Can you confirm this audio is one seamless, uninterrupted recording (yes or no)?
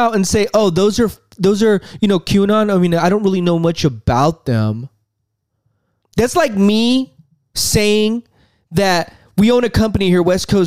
no